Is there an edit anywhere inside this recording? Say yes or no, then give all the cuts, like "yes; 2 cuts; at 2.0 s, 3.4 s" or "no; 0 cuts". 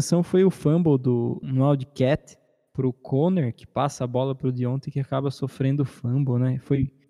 yes; 1 cut; at 1.4 s